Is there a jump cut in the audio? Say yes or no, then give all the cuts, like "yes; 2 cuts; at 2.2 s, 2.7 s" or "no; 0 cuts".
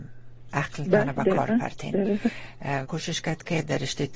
yes; 1 cut; at 2.8 s